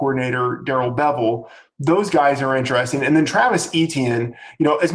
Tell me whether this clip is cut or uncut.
uncut